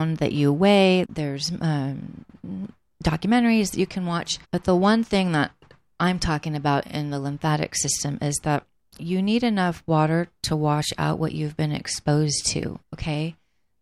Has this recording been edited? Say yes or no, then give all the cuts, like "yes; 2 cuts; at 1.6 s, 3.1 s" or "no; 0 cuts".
yes; 3 cuts; at 1.0 s, 4.4 s, 12.8 s